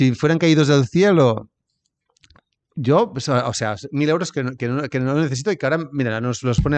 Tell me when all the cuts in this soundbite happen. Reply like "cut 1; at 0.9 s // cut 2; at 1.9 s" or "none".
none